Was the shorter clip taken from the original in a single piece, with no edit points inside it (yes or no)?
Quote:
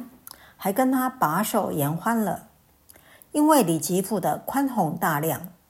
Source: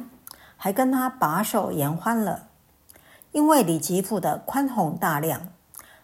yes